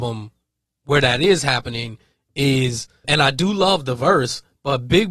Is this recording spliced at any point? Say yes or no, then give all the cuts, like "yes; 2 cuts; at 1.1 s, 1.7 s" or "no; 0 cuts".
yes; 1 cut; at 3.0 s